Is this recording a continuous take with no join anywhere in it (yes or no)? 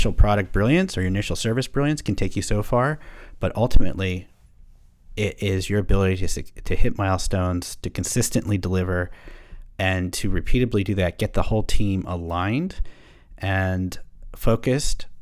yes